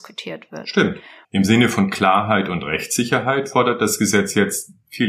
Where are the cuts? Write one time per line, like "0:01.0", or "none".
0:01.2

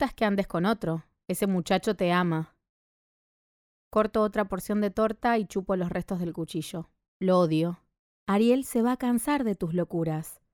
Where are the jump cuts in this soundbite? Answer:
0:08.1

